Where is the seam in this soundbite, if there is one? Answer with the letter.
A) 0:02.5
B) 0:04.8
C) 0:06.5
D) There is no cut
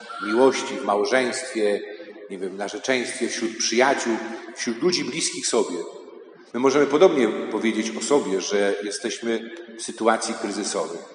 C